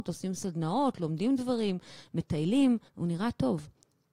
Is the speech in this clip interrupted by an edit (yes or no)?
yes